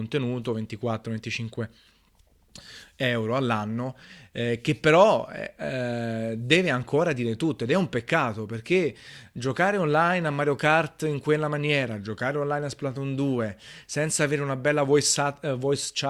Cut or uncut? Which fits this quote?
uncut